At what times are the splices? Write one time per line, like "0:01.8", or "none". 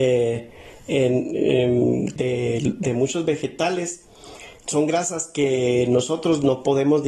0:02.2
0:04.7